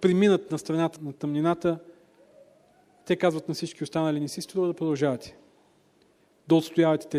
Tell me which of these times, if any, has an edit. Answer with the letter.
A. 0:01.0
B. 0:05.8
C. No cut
A